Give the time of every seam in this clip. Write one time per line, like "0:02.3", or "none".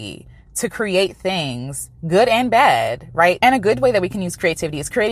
0:03.4